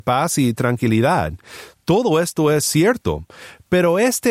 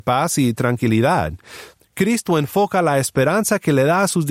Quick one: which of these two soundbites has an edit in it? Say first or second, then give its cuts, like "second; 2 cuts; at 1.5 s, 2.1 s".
second; 1 cut; at 1.8 s